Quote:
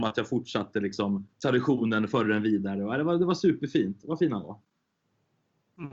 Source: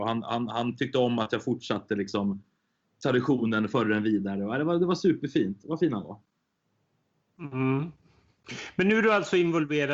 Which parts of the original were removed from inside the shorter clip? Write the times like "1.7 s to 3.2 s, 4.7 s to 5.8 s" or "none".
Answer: 2.5 s to 2.9 s